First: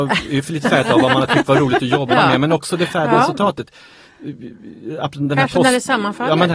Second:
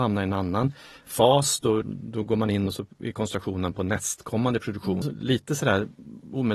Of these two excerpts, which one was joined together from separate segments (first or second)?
second